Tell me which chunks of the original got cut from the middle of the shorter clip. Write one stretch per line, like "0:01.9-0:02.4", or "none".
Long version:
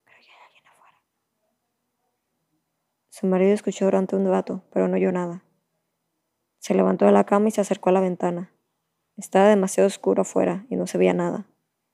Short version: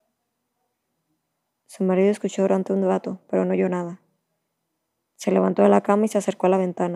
none